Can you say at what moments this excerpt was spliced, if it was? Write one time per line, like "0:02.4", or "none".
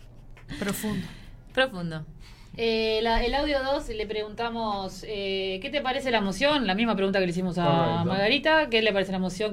none